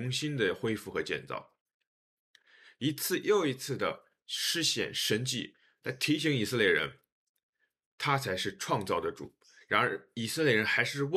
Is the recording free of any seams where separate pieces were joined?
yes; 0 cuts

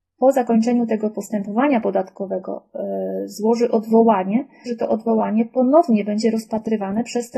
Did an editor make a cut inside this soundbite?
yes; 1 cut; at 4.7 s

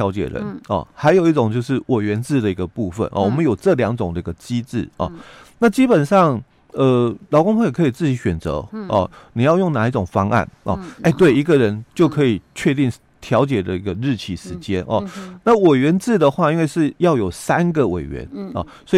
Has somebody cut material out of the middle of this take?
yes; 1 cut; at 11.0 s

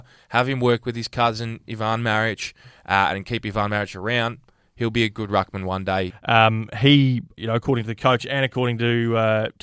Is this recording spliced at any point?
yes; 2 cuts; at 6.1 s, 7.4 s

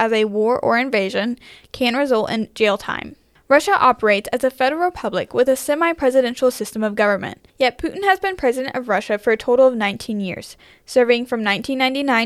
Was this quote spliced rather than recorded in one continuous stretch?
no; 0 cuts

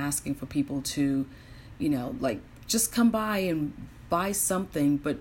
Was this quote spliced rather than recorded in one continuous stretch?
no; 0 cuts

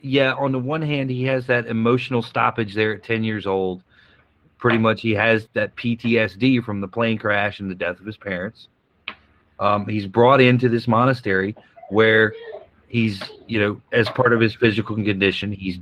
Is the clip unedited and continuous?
no; 1 cut; at 5.5 s

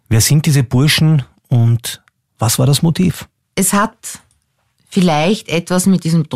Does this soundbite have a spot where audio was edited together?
no; 0 cuts

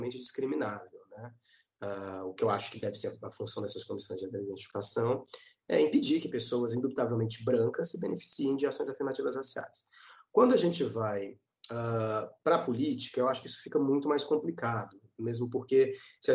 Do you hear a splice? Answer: no; 0 cuts

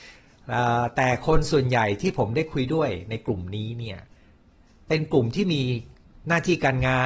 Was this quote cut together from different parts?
no; 0 cuts

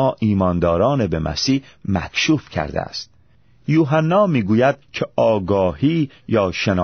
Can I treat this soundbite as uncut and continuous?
no; 1 cut; at 4.8 s

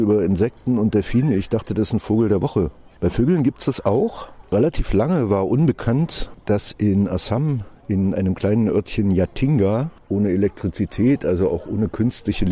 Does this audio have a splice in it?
yes; 1 cut; at 10.0 s

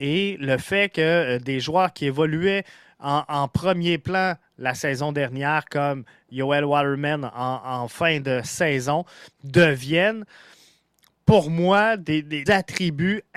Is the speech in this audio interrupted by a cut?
yes; 1 cut; at 12.5 s

